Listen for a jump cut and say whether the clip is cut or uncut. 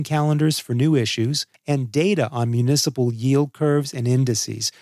cut